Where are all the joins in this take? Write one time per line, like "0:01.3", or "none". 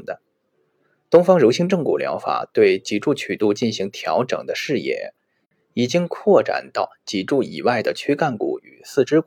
none